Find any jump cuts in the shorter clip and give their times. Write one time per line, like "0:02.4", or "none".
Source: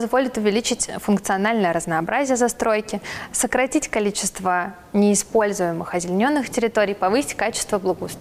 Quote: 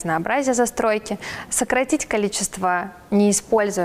none